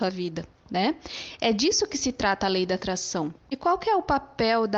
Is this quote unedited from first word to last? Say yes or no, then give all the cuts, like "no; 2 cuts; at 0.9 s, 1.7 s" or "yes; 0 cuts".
no; 1 cut; at 3.4 s